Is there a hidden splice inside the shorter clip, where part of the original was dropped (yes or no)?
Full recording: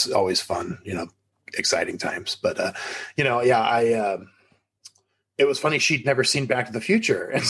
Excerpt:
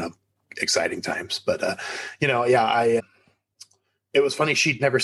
yes